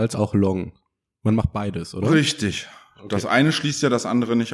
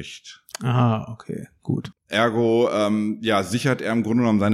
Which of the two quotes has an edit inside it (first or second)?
second